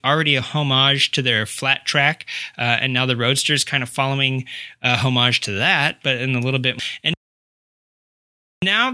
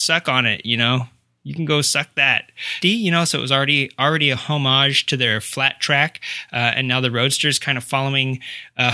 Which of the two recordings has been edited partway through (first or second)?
second